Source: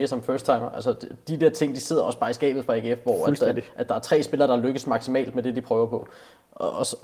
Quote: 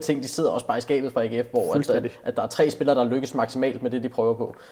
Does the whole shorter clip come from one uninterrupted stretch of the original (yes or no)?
yes